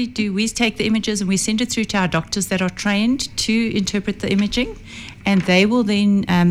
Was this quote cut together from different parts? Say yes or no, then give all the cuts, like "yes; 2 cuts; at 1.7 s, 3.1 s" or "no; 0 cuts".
no; 0 cuts